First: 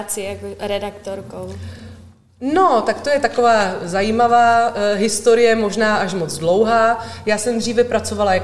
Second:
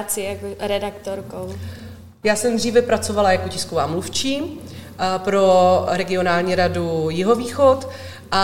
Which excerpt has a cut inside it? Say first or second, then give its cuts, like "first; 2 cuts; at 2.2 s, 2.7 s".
second; 1 cut; at 2.2 s